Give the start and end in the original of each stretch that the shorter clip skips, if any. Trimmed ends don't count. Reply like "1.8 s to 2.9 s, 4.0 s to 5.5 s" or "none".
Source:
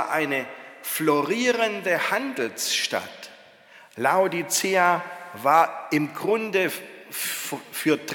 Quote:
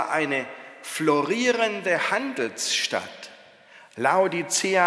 none